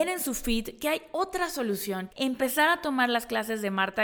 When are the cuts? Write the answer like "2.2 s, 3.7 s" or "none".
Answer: 2.1 s